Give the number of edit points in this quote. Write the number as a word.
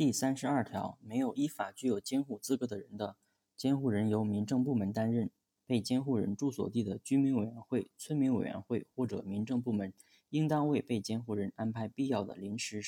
one